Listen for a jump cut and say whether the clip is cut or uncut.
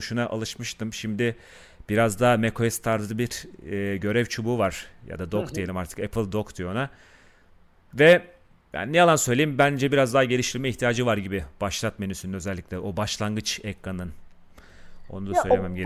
uncut